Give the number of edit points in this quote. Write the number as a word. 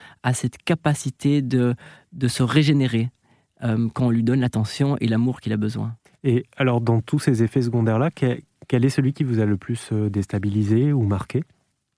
zero